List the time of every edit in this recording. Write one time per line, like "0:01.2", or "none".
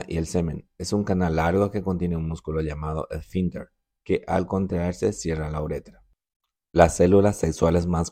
none